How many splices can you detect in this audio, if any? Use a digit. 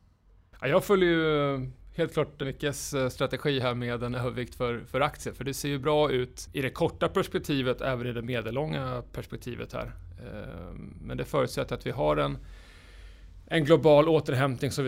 1